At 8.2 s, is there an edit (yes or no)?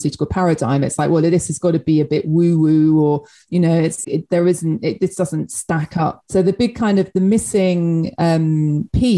no